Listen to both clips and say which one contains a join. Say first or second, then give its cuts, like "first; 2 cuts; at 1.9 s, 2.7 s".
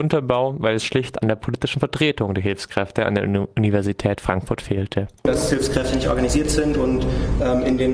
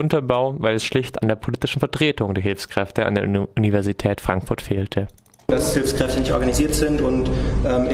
first; 1 cut; at 5.2 s